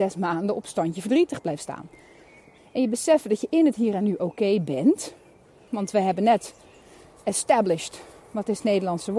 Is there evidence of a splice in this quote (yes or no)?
yes